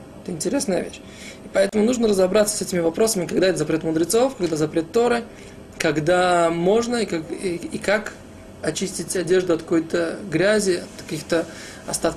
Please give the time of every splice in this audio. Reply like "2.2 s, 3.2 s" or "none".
none